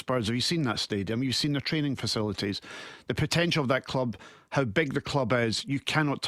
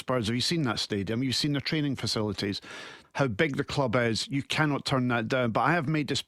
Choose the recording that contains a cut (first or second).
second